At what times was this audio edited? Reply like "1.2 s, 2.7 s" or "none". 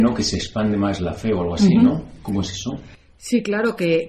none